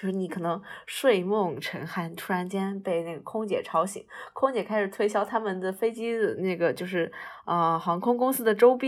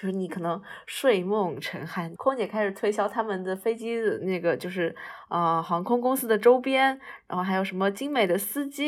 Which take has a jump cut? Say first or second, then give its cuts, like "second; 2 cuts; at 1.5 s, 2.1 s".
second; 1 cut; at 2.2 s